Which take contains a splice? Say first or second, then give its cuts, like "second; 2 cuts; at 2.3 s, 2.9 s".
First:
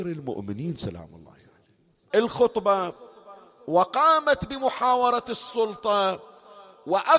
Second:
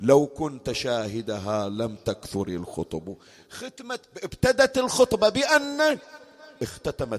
first; 1 cut; at 2.1 s